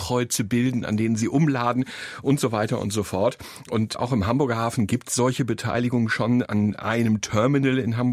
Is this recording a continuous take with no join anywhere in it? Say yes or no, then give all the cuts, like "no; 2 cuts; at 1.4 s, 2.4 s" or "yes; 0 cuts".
yes; 0 cuts